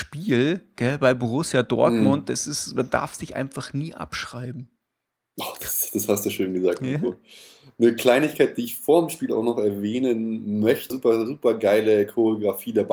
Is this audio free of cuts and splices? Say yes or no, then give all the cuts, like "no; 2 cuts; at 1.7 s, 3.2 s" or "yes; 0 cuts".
no; 1 cut; at 10.9 s